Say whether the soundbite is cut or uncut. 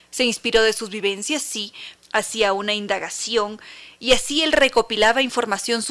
cut